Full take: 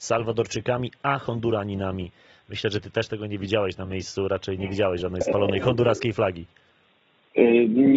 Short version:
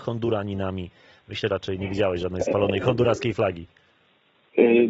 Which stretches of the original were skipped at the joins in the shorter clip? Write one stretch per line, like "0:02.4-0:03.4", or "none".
0:02.7-0:04.3